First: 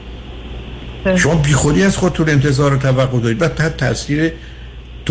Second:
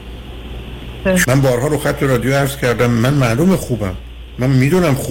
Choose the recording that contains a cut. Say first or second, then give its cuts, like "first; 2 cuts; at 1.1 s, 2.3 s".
second; 1 cut; at 1.2 s